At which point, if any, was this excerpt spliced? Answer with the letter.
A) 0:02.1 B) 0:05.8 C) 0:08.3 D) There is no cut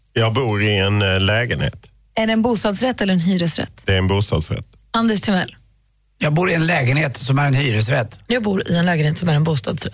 C